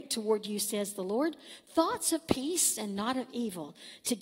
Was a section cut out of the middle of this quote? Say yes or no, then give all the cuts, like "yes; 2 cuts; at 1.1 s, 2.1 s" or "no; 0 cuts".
no; 0 cuts